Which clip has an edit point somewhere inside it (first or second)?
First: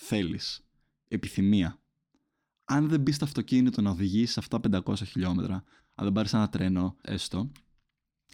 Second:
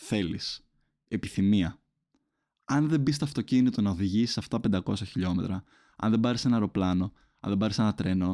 first